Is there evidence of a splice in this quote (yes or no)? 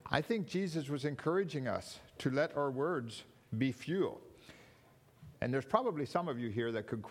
yes